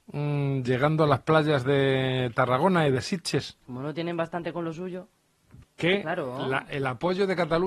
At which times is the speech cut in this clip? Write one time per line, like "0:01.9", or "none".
0:03.6
0:05.6